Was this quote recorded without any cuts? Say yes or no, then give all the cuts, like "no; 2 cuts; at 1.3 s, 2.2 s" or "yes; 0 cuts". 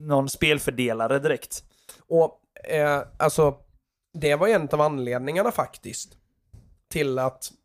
no; 1 cut; at 2.0 s